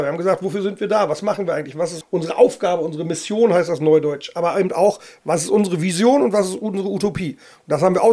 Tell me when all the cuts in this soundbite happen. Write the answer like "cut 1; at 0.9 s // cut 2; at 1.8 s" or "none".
cut 1; at 2.0 s